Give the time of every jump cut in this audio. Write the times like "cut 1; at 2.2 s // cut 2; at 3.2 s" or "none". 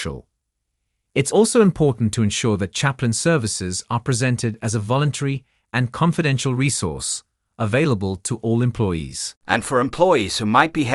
none

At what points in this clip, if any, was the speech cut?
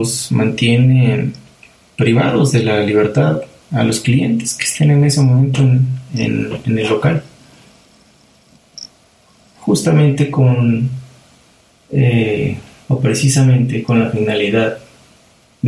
none

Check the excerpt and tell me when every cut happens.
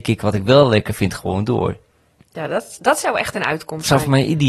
none

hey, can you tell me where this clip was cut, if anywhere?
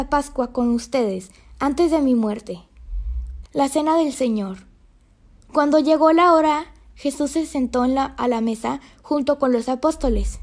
cut 1; at 3.4 s

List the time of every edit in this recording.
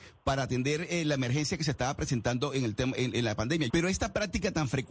cut 1; at 3.7 s

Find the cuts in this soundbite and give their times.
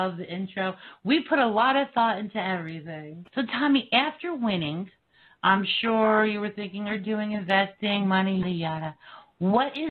cut 1; at 3.2 s // cut 2; at 8.4 s

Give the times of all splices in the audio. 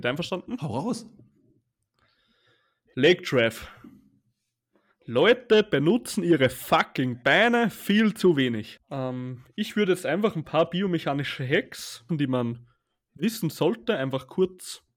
cut 1; at 8.8 s // cut 2; at 12.1 s

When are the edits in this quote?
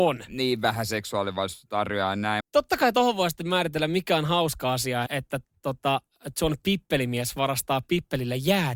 cut 1; at 2.4 s // cut 2; at 5.1 s

